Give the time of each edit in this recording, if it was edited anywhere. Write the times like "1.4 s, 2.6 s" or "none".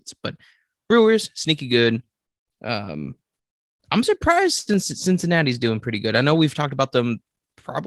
none

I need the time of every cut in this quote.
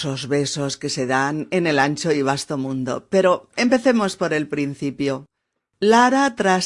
none

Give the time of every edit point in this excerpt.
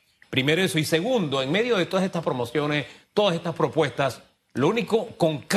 none

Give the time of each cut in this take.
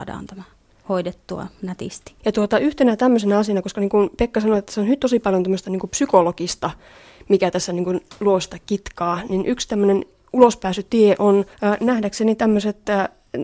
2.2 s, 11.5 s

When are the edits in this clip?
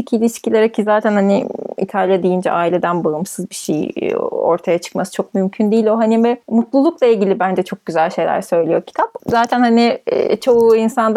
6.4 s, 9.2 s

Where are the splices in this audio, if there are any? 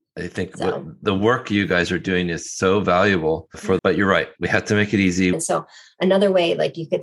3.8 s, 5.3 s

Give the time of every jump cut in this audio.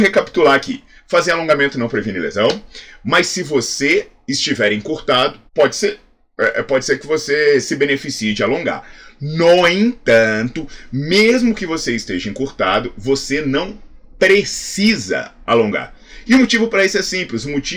5.5 s

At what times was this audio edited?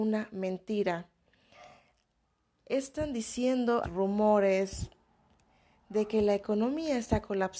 3.8 s

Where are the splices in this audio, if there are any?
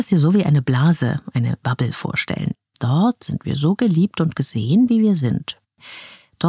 2.7 s

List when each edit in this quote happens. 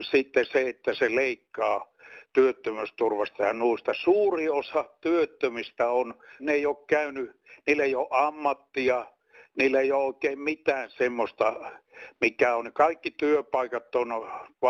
6.4 s

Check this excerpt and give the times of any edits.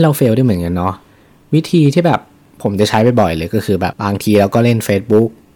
3.9 s

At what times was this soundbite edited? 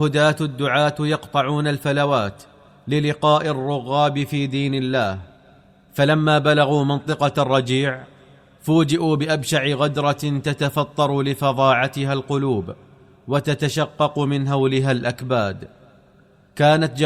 none

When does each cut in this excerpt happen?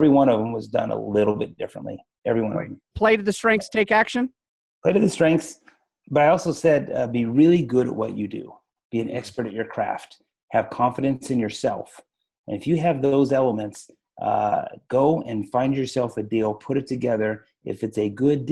none

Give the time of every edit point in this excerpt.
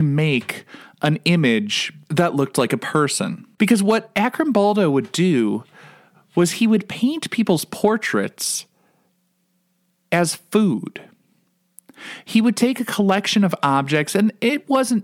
3.6 s

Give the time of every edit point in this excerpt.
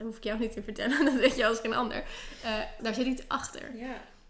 2.8 s

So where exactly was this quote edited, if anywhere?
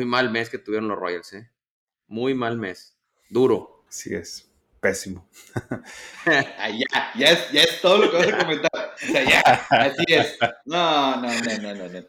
3.9 s

